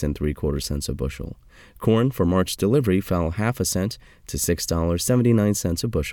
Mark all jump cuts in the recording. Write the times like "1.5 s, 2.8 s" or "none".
none